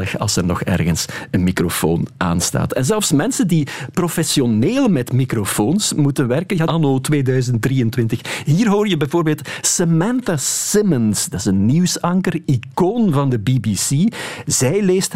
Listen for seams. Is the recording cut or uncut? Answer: cut